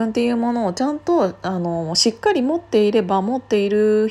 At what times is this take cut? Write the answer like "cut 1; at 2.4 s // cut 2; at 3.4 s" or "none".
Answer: none